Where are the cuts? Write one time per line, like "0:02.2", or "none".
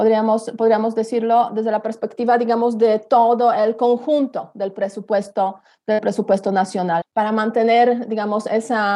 0:07.0